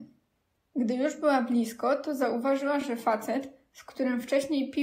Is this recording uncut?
yes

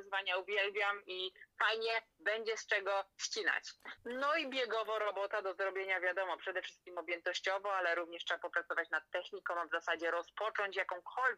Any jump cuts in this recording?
yes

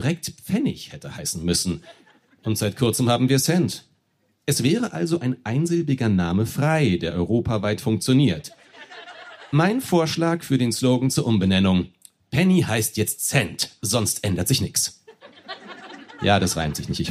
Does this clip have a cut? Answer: no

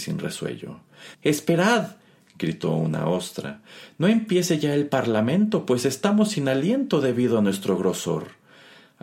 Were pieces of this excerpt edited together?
yes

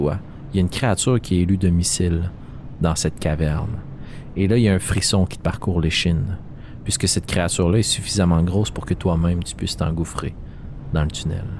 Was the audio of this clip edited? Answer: no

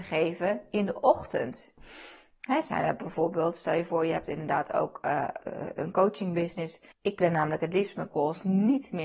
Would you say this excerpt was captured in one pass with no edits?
no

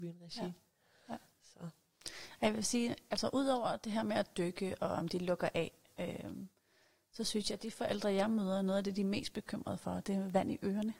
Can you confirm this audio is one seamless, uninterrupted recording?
yes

